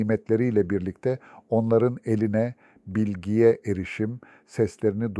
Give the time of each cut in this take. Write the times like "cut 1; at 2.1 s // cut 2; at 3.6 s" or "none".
none